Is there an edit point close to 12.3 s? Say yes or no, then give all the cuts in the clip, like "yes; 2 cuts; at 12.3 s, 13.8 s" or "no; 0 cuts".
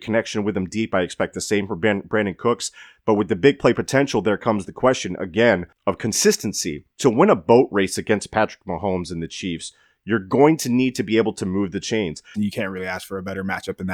yes; 2 cuts; at 6.9 s, 12.3 s